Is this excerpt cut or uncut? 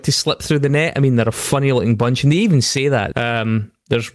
cut